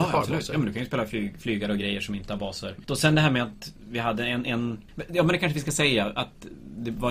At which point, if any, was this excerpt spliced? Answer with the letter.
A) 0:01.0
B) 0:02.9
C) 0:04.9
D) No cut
B